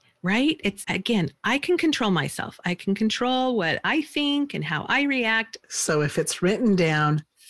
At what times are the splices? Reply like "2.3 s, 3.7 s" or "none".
5.6 s